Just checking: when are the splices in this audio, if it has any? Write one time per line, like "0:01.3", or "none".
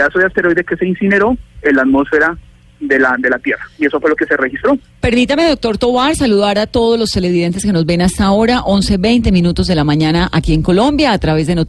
none